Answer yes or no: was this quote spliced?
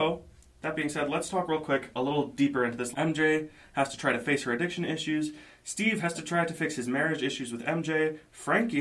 yes